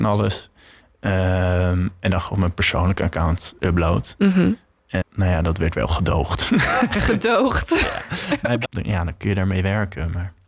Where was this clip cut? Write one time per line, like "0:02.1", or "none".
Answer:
0:05.0
0:08.6